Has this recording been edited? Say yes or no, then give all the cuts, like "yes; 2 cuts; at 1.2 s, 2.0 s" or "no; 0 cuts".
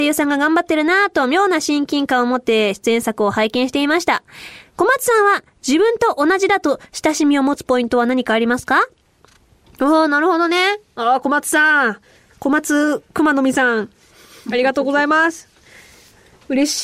no; 0 cuts